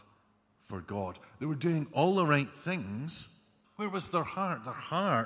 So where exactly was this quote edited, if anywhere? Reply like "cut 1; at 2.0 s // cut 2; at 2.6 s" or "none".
cut 1; at 3.6 s